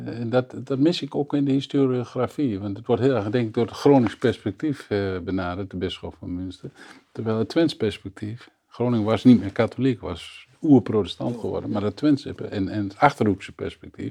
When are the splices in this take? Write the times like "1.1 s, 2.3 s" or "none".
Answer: none